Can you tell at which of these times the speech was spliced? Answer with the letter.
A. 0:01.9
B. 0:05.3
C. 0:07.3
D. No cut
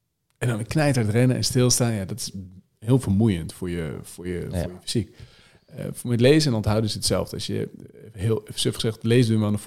D